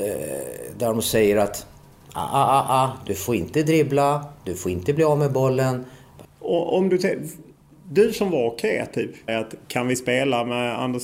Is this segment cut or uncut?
cut